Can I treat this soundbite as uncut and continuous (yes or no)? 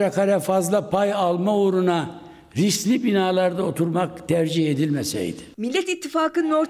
no